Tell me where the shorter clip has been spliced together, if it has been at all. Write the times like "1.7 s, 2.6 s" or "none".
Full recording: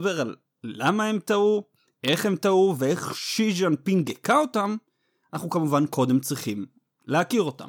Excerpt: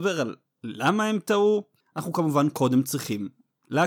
1.8 s